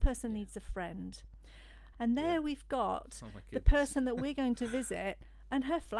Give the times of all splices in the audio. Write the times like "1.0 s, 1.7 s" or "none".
1.9 s